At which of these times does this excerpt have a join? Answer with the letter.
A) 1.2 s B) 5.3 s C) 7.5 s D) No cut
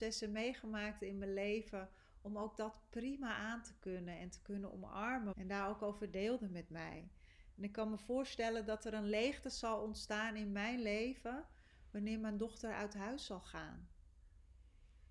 B